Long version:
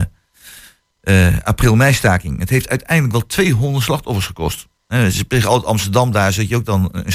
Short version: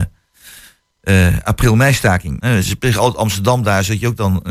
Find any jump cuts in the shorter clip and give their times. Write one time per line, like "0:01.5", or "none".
0:02.4